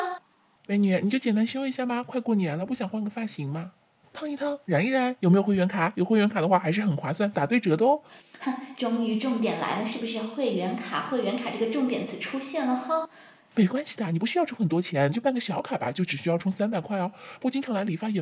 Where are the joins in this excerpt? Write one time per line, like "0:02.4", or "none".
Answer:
none